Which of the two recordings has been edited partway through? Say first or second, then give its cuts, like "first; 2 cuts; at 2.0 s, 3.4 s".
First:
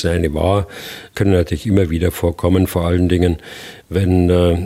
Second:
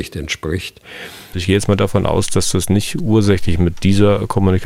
second; 1 cut; at 1.3 s